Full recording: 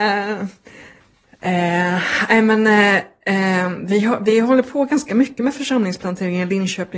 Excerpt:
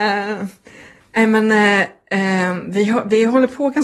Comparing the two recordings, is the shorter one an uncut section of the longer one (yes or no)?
no